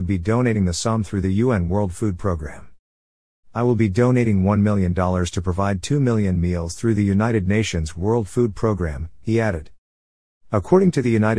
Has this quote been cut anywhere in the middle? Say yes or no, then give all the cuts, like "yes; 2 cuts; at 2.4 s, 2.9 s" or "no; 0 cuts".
no; 0 cuts